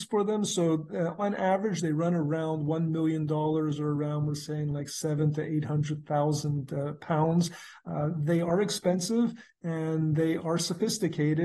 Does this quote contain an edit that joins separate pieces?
no; 0 cuts

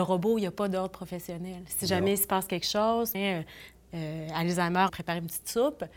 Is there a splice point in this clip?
yes; 2 cuts; at 3.1 s, 4.9 s

